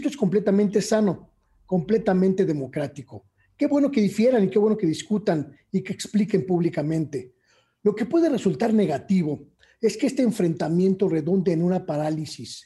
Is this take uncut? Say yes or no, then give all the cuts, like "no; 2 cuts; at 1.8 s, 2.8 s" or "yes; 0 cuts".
yes; 0 cuts